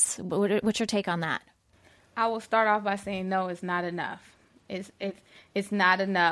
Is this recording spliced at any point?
no; 0 cuts

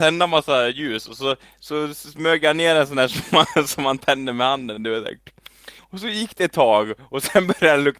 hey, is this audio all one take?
no; 1 cut; at 5.8 s

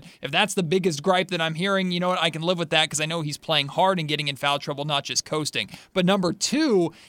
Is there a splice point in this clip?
no; 0 cuts

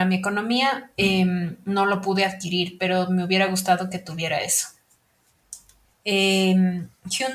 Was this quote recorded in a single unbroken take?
no; 1 cut; at 5.8 s

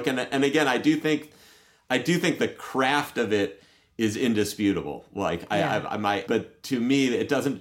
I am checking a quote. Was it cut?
yes; 1 cut; at 6.3 s

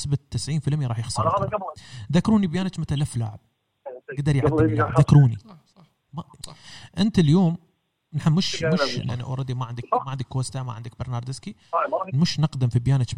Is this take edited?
yes; 2 cuts; at 9.1 s, 12.1 s

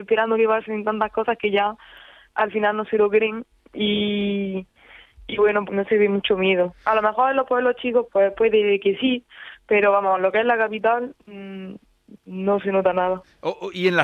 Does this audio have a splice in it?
yes; 1 cut; at 5.7 s

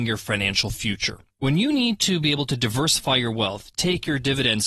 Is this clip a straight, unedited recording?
no; 1 cut; at 1.3 s

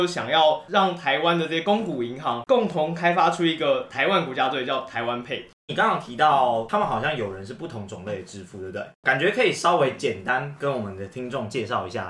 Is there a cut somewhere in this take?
no; 0 cuts

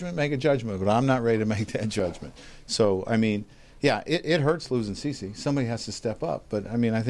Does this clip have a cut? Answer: no; 0 cuts

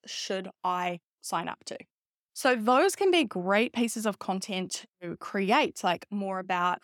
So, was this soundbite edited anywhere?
no; 0 cuts

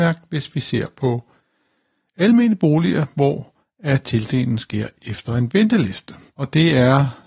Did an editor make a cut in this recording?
yes; 1 cut; at 6.3 s

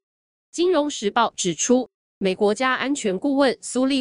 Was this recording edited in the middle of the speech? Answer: yes; 1 cut; at 2.4 s

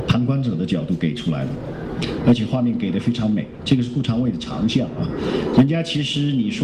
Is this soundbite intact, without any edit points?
yes; 0 cuts

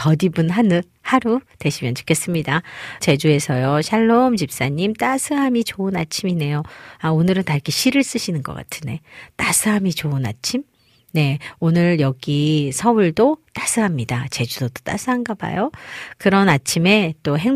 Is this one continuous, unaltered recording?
no; 1 cut; at 3.0 s

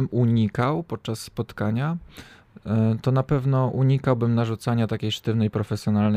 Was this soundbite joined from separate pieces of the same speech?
no; 0 cuts

